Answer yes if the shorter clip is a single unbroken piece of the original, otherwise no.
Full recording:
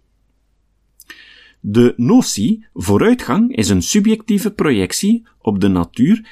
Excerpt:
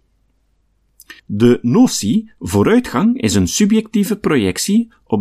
no